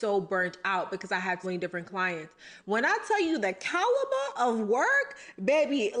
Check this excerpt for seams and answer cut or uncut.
cut